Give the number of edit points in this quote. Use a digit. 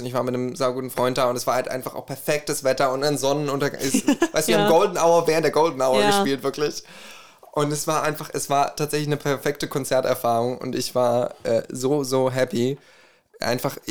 0